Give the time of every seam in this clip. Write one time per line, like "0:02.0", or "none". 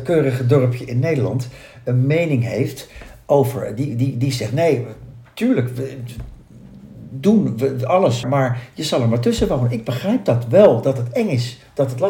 0:08.2

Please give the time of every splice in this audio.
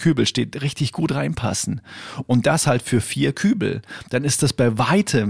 none

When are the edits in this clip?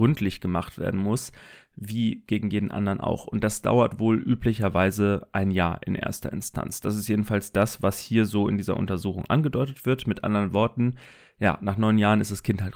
none

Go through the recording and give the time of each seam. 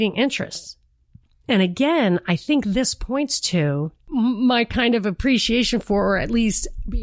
none

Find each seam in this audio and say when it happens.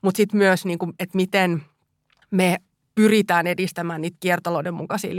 none

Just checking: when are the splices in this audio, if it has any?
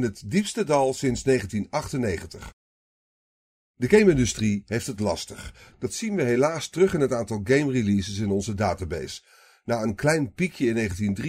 none

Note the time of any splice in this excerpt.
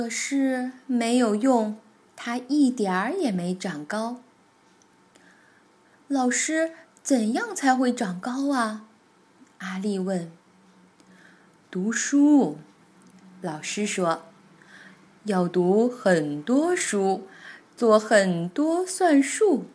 none

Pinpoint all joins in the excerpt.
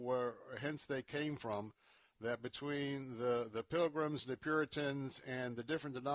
none

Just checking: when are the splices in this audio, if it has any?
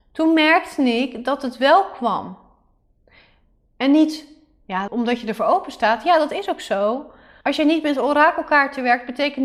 0:04.9
0:07.4

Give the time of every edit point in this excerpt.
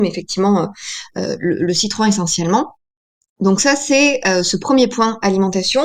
none

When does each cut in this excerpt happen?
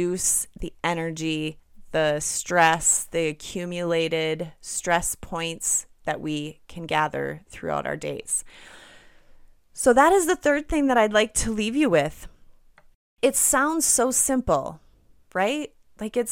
none

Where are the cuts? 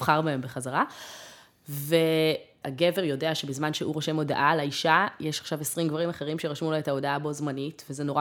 0:02.6

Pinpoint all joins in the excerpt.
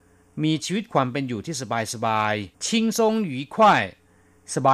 0:02.5

